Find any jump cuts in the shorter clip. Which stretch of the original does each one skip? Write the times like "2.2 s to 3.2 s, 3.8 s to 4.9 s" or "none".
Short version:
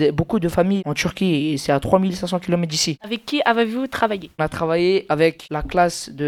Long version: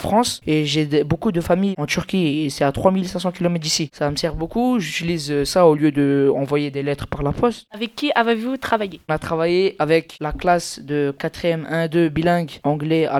3.9 s to 7.7 s